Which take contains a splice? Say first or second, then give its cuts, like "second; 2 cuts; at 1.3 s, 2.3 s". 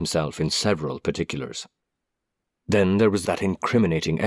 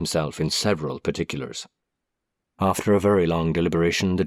second; 1 cut; at 2.5 s